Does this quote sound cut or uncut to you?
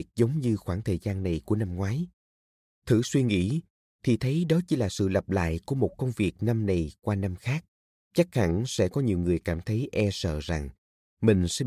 cut